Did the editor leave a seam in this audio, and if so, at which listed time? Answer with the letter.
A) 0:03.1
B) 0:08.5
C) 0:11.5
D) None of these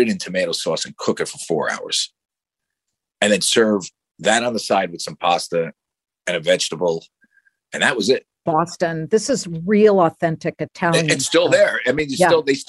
B